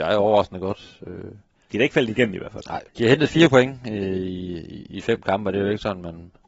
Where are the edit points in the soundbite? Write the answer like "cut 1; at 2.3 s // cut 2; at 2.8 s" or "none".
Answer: none